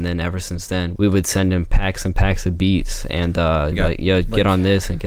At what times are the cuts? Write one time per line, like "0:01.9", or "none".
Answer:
0:01.0
0:03.7